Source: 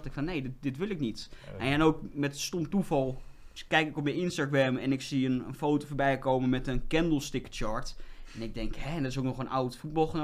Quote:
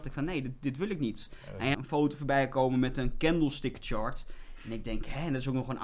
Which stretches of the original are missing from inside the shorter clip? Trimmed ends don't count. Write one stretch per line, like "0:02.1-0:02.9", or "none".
0:01.7-0:05.4